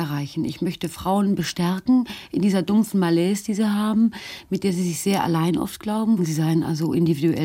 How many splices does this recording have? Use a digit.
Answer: 1